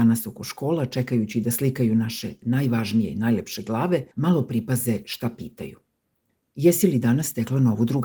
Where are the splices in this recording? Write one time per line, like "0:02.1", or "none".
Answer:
0:04.1